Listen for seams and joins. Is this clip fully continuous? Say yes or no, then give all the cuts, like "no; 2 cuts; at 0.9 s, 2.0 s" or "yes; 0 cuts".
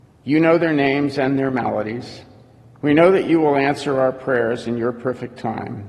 no; 1 cut; at 2.8 s